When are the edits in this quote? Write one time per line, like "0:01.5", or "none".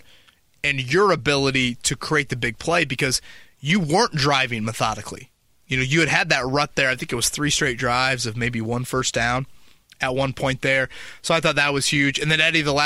none